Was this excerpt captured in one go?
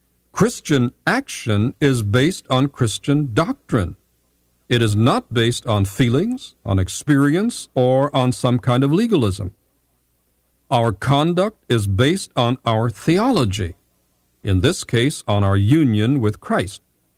yes; 0 cuts

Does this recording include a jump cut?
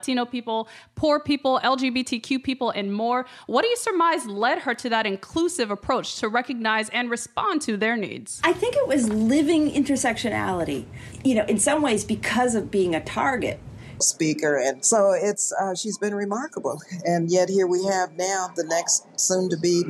yes; 1 cut; at 14.0 s

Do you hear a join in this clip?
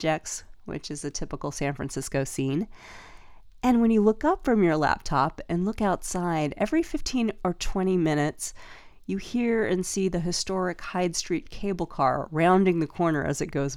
no; 0 cuts

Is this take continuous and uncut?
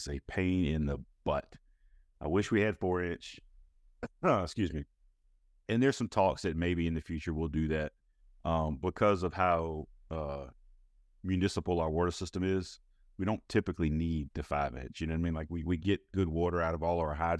no; 1 cut; at 3.7 s

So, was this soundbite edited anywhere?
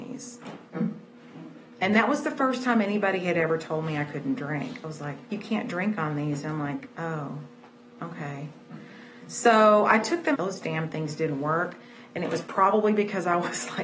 yes; 2 cuts; at 5.3 s, 10.3 s

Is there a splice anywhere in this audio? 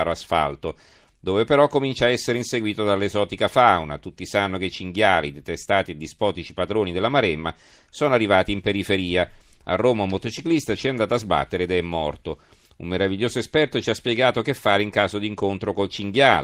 no; 0 cuts

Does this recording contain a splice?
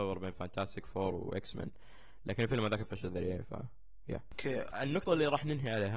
yes; 2 cuts; at 2.8 s, 4.7 s

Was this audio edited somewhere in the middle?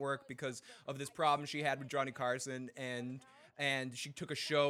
no; 0 cuts

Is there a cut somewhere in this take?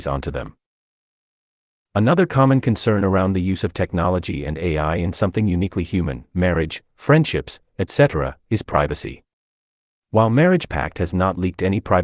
no; 0 cuts

